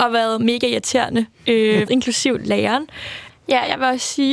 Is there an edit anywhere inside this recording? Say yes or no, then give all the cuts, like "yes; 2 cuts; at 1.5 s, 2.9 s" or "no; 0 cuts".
yes; 2 cuts; at 1.9 s, 3.3 s